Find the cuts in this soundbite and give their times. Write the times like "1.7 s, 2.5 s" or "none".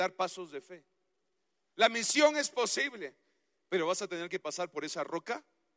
1.6 s